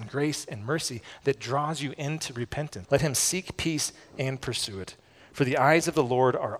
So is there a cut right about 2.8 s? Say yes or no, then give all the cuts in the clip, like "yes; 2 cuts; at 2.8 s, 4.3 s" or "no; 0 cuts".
yes; 1 cut; at 2.8 s